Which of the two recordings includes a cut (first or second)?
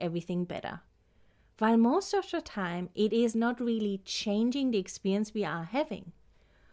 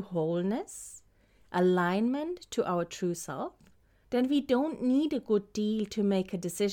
second